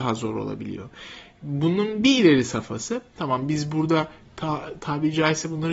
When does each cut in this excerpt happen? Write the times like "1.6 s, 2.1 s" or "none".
none